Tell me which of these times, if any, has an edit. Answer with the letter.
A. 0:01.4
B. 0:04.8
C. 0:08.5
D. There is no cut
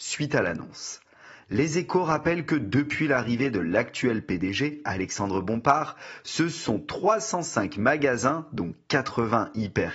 D